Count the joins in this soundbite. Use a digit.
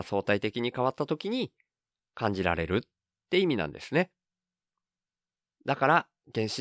0